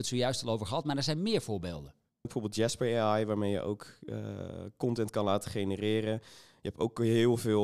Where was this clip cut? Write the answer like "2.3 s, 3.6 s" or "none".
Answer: 2.2 s

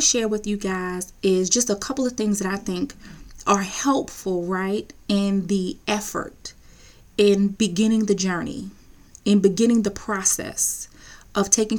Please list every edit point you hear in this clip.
none

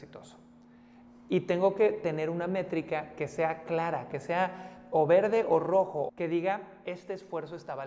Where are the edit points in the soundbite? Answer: 4.1 s, 6.1 s

